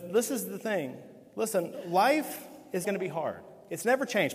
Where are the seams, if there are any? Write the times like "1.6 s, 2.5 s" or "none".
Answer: 2.8 s